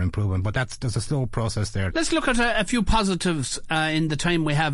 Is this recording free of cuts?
no; 1 cut; at 1.9 s

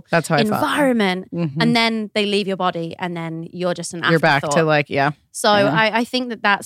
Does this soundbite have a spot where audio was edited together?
no; 0 cuts

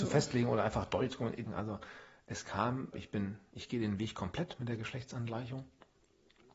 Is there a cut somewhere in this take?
yes; 2 cuts; at 1.5 s, 2.9 s

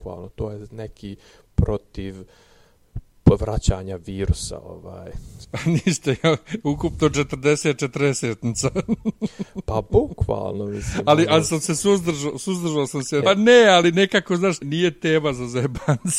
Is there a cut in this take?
yes; 3 cuts; at 5.4 s, 13.2 s, 14.6 s

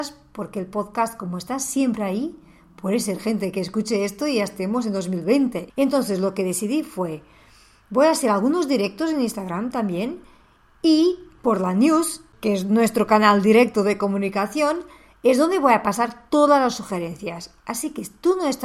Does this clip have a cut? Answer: yes; 1 cut; at 5.7 s

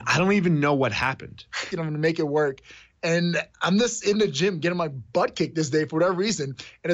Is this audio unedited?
no; 1 cut; at 1.7 s

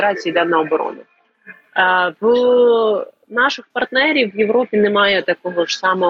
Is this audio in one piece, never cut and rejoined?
yes; 0 cuts

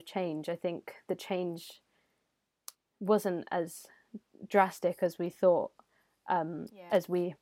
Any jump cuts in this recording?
no; 0 cuts

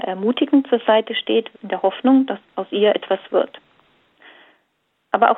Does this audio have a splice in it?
yes; 1 cut; at 1.5 s

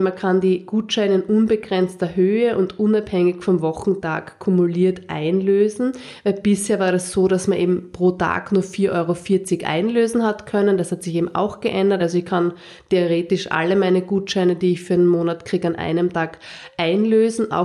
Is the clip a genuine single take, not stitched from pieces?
yes; 0 cuts

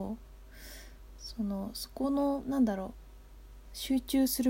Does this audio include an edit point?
no; 0 cuts

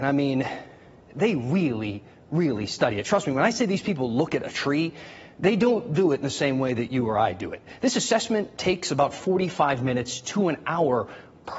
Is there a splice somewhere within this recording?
no; 0 cuts

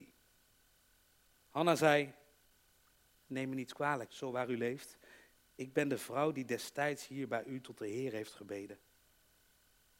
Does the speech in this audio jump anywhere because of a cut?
yes; 1 cut; at 4.1 s

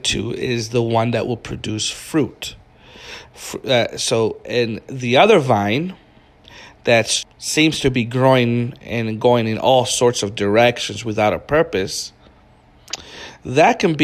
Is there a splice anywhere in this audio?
yes; 2 cuts; at 3.2 s, 7.2 s

